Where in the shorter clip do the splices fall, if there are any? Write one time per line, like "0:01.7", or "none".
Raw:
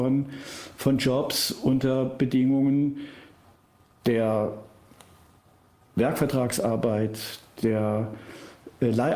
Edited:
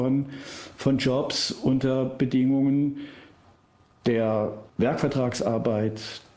0:04.7